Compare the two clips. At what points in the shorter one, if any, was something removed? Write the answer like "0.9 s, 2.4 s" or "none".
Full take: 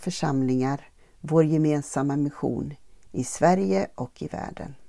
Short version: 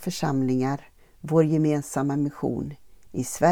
none